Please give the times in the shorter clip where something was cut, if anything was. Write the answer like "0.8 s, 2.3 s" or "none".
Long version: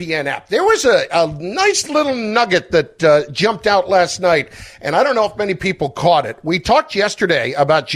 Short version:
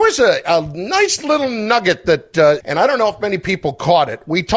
2.6 s